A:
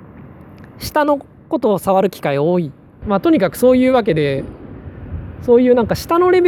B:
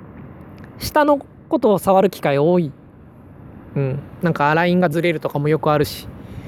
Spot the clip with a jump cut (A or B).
A